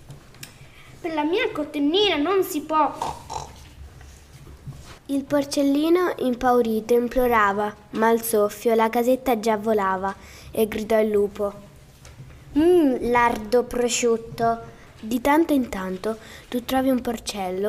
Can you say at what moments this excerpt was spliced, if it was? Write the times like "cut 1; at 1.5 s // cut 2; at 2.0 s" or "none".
cut 1; at 5.0 s // cut 2; at 14.9 s